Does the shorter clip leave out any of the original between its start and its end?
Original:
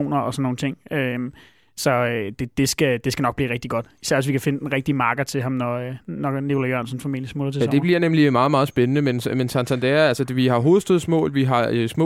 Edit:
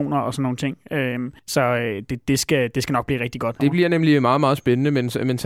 yes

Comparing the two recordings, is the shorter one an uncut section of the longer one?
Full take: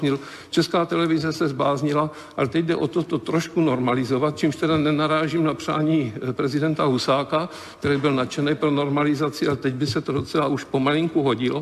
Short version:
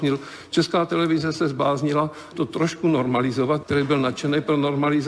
no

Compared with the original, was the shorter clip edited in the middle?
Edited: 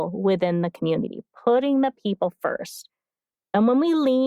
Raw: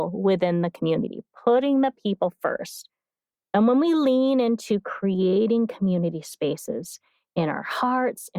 no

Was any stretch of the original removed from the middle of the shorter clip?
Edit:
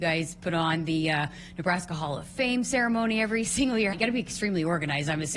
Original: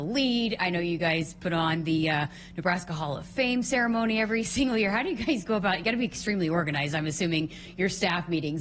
yes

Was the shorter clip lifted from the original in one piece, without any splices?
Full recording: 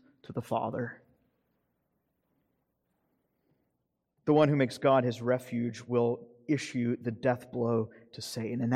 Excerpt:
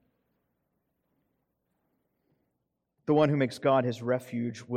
yes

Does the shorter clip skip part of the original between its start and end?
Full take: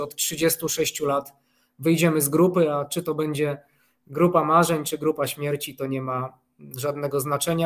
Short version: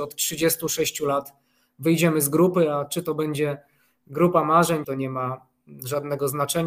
yes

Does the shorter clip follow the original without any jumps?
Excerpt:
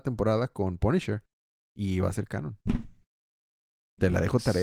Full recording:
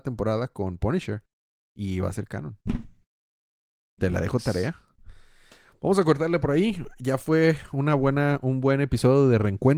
yes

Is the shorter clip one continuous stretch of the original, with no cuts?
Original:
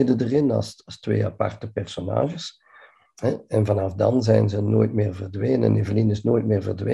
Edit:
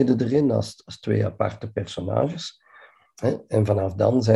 yes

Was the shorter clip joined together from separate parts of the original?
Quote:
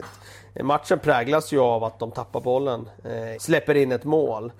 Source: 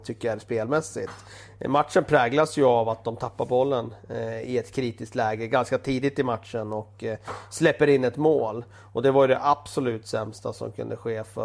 yes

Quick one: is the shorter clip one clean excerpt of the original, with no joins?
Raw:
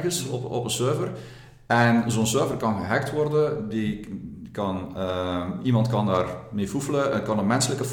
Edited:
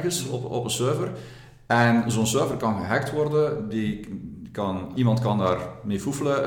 no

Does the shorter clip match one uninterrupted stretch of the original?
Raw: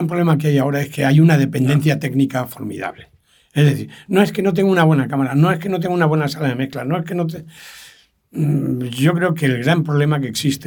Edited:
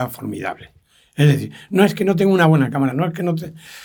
no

